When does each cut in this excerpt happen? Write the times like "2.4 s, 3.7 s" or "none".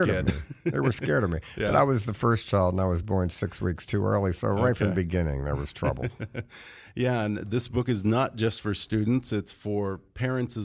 none